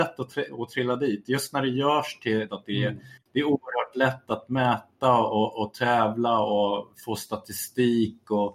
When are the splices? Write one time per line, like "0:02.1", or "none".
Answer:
0:02.5